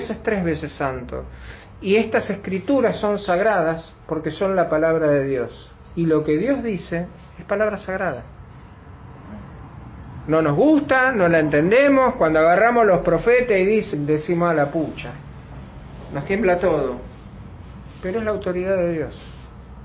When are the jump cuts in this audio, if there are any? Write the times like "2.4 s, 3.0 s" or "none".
13.9 s